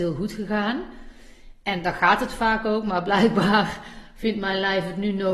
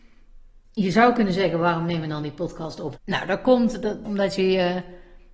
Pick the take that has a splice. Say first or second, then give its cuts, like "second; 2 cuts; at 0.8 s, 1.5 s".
second; 2 cuts; at 3.0 s, 4.0 s